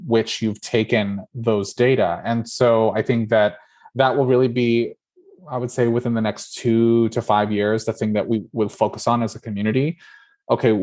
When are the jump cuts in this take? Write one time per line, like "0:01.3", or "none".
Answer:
none

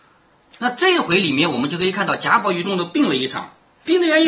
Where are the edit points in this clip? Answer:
0:02.6

